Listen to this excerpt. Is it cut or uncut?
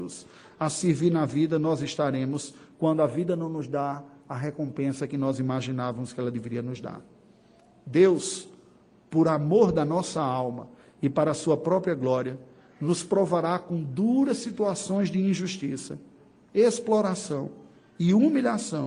uncut